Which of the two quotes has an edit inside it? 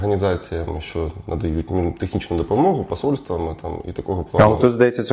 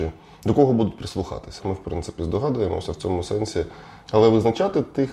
second; 2 cuts; at 1.6 s, 4.1 s

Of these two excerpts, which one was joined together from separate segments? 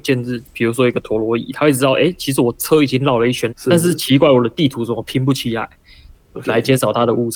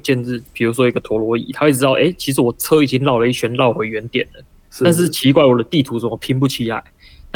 first; 2 cuts; at 3.5 s, 6.1 s

